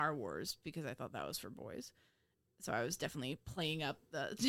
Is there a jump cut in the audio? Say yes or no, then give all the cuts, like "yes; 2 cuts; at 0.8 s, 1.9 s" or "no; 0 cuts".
no; 0 cuts